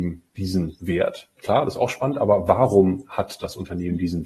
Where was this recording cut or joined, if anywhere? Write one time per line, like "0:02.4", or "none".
0:01.4